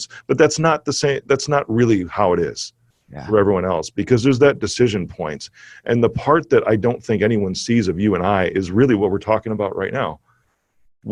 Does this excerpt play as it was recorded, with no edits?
yes; 0 cuts

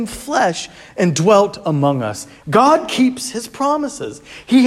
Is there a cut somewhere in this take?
yes; 1 cut; at 2.4 s

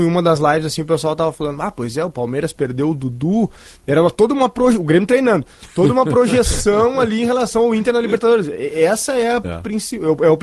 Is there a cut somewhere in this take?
no; 0 cuts

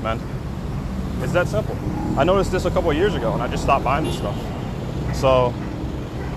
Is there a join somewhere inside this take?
yes; 1 cut; at 1.2 s

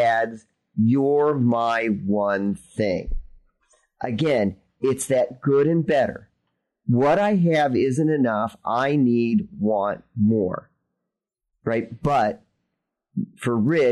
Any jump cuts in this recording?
no; 0 cuts

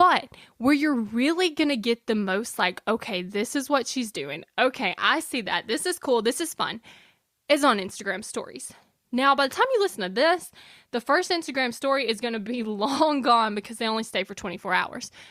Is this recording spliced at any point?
no; 0 cuts

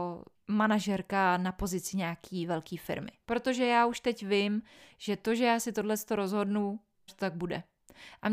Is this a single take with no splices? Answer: no; 2 cuts; at 3.2 s, 7.1 s

